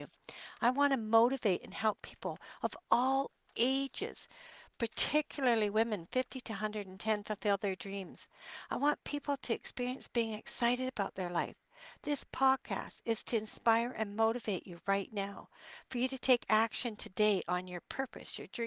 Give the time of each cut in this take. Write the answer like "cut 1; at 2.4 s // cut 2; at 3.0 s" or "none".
none

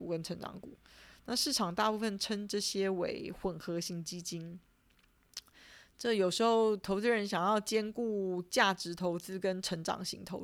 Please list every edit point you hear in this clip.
none

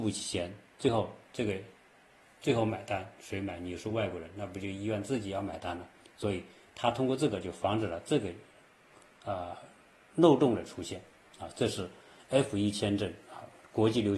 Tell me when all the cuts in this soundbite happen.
none

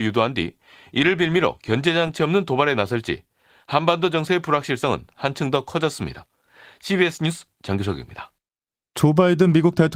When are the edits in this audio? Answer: none

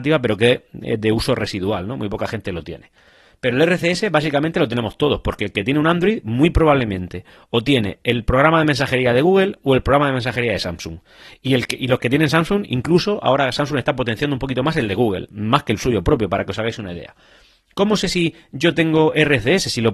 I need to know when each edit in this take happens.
none

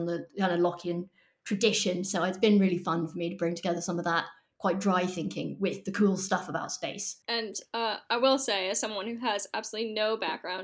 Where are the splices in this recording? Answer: none

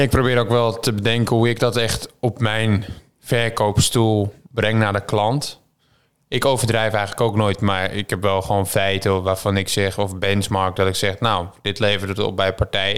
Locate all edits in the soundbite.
none

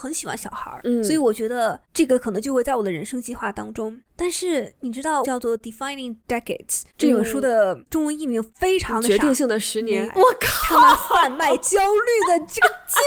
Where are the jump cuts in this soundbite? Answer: cut 1; at 5.2 s // cut 2; at 10.1 s

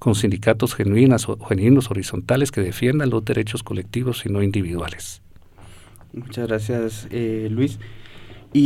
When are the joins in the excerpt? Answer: none

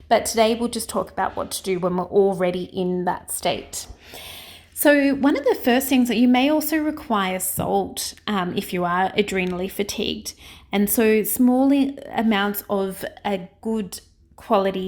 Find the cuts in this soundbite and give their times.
none

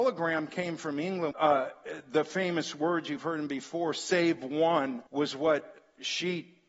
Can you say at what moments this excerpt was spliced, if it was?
cut 1; at 1.3 s // cut 2; at 5.1 s

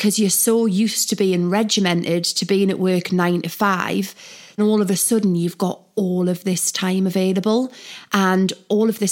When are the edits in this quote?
cut 1; at 4.6 s

